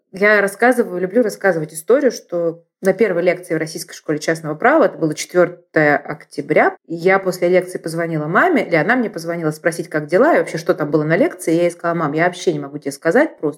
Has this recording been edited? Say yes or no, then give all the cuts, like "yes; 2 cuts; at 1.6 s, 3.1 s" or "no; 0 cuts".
yes; 1 cut; at 6.7 s